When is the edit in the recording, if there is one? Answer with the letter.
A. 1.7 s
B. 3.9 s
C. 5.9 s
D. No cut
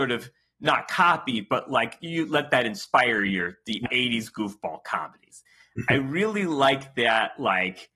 B